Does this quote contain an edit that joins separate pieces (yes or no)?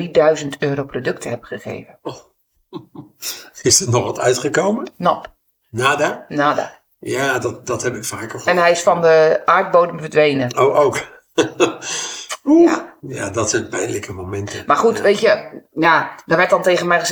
no